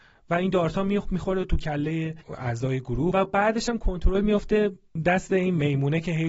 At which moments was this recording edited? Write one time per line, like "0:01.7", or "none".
0:03.1